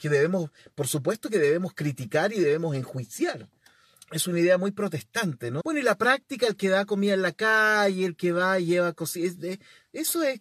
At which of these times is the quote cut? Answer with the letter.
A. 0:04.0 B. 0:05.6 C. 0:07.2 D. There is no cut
B